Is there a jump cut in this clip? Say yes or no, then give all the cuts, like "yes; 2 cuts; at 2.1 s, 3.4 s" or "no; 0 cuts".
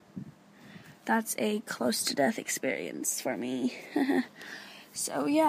no; 0 cuts